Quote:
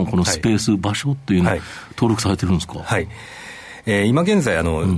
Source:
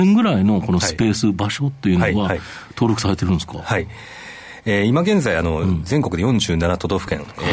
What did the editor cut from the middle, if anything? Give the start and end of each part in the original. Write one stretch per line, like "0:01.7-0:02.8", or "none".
0:02.0-0:02.3